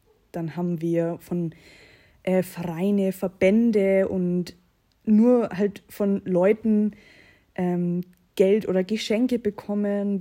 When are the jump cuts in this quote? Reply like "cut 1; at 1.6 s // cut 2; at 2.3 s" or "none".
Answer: none